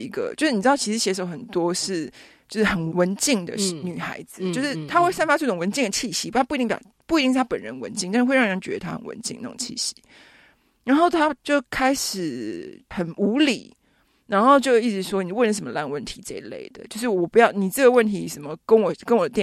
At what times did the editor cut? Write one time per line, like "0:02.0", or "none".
0:02.9